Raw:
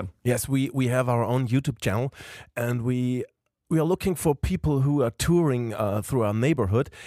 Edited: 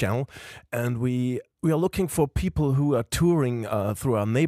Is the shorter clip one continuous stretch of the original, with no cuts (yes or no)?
no